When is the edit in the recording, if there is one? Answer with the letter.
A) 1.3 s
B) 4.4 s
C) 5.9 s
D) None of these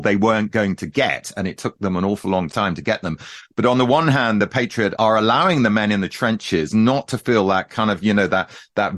D